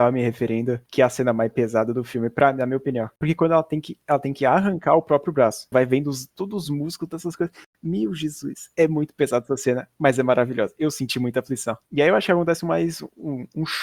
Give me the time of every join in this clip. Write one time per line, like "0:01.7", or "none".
0:05.7